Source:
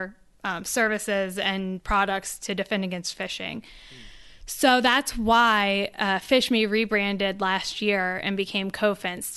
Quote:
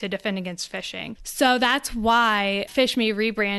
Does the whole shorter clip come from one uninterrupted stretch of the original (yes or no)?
no